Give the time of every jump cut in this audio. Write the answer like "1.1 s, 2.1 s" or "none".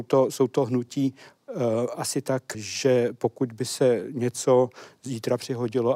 2.5 s